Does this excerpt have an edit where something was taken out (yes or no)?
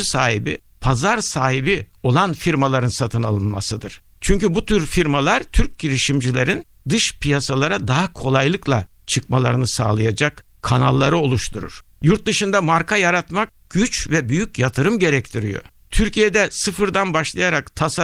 no